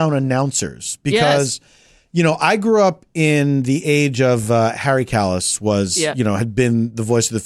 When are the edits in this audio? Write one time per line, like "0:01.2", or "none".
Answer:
none